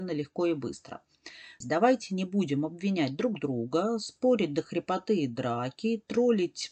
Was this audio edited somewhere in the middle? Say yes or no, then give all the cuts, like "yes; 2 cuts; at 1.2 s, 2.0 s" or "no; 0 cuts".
yes; 1 cut; at 1.6 s